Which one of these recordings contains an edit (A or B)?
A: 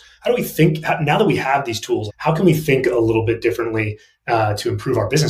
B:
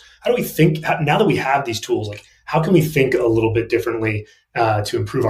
A